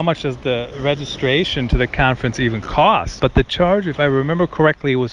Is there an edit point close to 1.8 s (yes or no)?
no